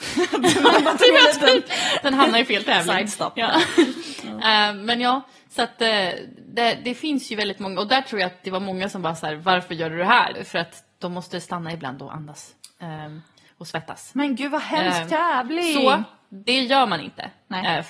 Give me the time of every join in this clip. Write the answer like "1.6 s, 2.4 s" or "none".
10.3 s